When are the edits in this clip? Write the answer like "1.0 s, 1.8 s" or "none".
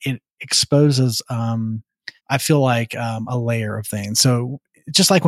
2.2 s